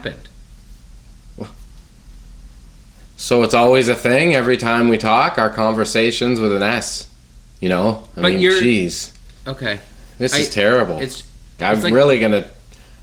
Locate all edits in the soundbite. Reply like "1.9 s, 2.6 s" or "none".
9.4 s, 11.6 s